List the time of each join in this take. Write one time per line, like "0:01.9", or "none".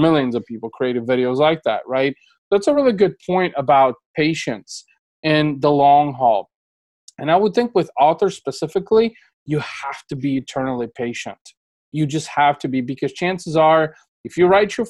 none